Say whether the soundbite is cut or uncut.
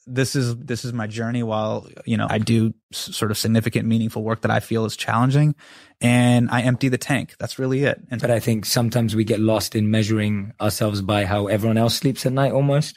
cut